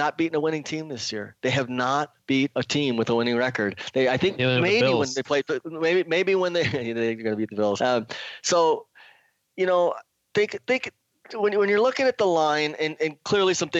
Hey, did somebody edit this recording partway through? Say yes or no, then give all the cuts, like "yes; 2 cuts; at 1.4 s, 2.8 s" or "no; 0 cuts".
yes; 1 cut; at 7.8 s